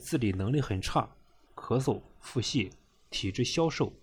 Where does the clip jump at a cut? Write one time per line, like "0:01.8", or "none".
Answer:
0:01.5